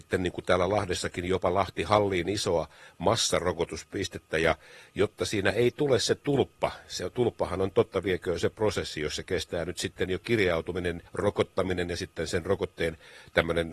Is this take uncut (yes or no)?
no